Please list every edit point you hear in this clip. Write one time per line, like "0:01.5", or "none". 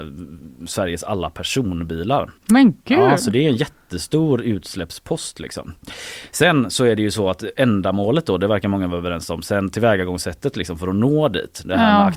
0:02.4